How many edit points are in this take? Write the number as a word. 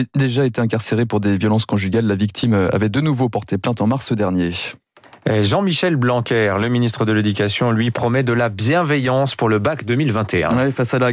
zero